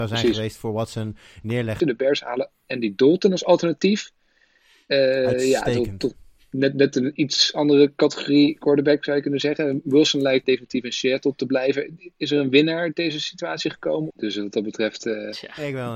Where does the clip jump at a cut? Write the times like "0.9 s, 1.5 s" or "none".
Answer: 1.8 s, 10.4 s, 14.1 s